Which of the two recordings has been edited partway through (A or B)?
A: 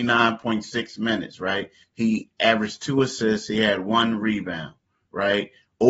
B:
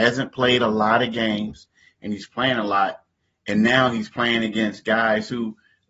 A